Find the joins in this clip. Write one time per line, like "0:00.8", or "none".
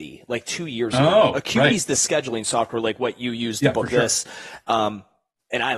none